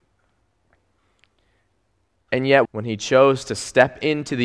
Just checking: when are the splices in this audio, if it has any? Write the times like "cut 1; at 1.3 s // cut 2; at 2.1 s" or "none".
cut 1; at 2.7 s